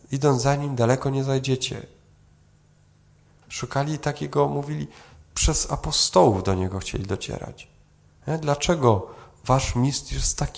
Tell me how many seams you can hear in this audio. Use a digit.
1